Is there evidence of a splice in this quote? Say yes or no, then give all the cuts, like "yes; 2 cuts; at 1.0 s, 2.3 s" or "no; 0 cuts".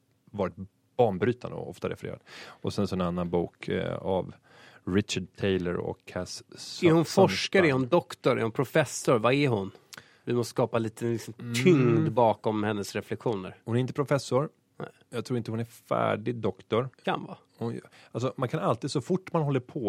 yes; 1 cut; at 16.9 s